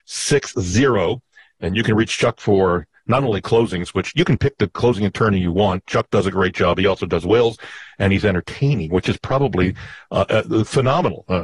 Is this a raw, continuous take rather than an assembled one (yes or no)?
yes